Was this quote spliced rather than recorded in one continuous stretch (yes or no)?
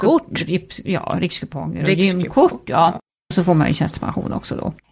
no